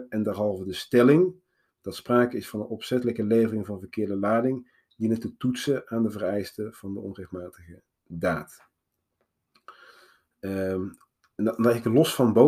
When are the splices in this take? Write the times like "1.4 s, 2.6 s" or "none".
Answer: none